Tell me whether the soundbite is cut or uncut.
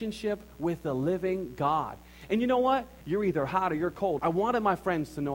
cut